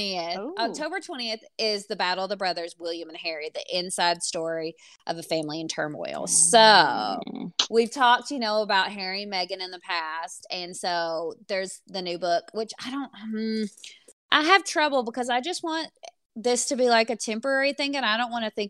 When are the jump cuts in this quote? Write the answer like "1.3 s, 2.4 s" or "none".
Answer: none